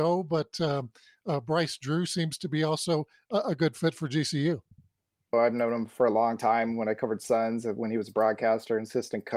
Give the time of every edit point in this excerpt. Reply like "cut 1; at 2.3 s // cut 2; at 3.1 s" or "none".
cut 1; at 5.3 s